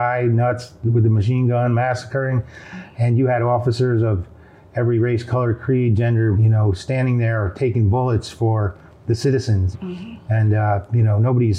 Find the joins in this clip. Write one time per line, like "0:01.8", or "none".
0:06.4
0:09.7